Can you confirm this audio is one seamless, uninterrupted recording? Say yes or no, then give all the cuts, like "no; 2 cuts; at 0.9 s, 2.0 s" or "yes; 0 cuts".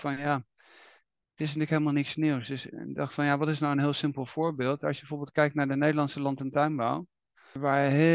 yes; 0 cuts